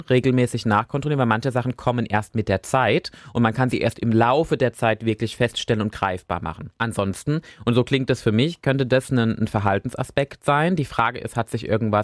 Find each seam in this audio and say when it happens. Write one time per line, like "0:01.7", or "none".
none